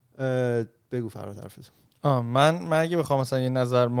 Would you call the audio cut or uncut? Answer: uncut